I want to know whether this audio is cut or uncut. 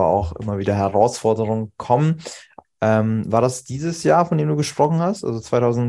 cut